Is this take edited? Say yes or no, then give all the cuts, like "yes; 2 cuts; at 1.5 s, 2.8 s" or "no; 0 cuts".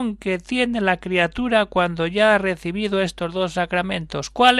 no; 0 cuts